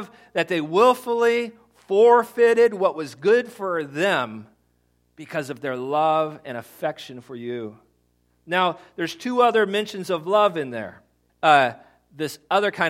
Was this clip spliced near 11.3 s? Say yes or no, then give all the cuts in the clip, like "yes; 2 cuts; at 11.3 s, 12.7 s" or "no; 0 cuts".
yes; 1 cut; at 11.3 s